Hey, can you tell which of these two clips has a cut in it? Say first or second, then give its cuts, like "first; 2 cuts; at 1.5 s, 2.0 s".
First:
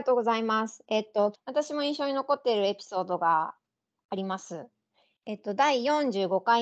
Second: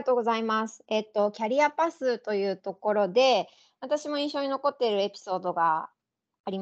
first; 1 cut; at 1.3 s